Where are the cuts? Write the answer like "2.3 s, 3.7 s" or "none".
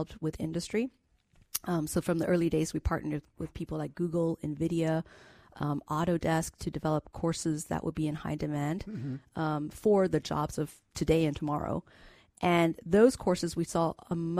none